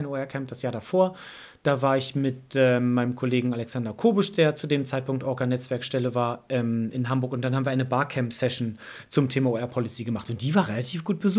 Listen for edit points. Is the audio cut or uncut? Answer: uncut